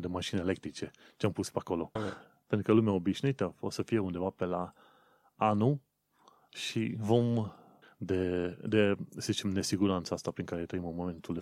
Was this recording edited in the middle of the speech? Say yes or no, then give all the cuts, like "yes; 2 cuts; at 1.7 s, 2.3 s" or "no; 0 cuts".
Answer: yes; 2 cuts; at 2.0 s, 7.8 s